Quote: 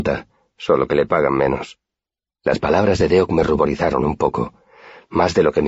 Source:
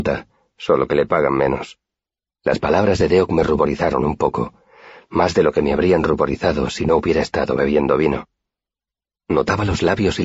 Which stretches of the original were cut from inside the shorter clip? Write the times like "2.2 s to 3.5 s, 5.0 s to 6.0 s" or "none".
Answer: none

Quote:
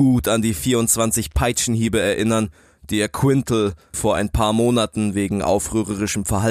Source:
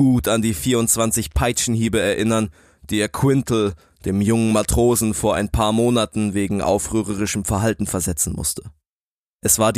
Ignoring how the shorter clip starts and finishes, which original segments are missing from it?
3.9 s to 5.1 s

